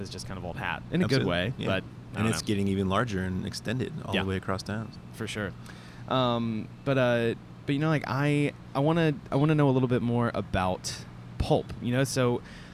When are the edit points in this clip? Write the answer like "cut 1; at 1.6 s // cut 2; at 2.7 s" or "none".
cut 1; at 5.0 s